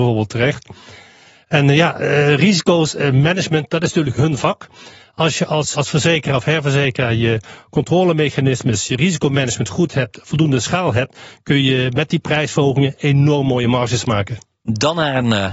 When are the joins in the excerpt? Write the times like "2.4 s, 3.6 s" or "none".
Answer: 5.7 s, 9.7 s